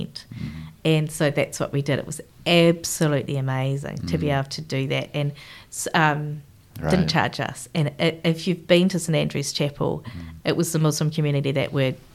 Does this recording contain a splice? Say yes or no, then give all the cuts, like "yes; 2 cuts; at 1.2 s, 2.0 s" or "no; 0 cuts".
yes; 2 cuts; at 6.7 s, 10.4 s